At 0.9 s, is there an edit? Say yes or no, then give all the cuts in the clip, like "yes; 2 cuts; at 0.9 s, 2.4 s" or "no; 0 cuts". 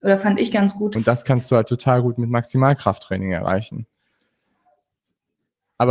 yes; 1 cut; at 0.9 s